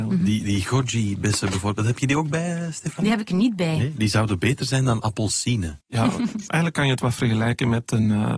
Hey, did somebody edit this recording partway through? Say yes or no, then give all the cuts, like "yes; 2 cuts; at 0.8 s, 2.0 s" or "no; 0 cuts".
yes; 1 cut; at 5.8 s